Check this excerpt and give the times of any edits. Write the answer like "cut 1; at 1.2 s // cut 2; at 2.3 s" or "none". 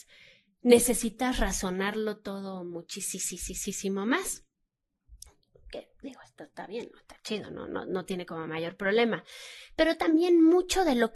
none